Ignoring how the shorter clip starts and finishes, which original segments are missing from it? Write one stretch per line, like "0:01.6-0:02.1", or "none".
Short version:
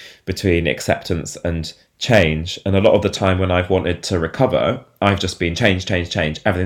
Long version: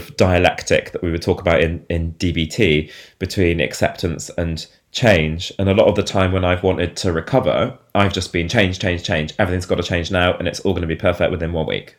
none